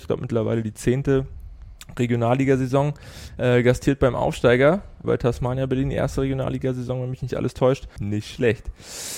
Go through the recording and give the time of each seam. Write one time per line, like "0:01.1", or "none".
0:05.0
0:08.0